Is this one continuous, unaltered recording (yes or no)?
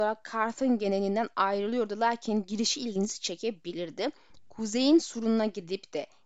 yes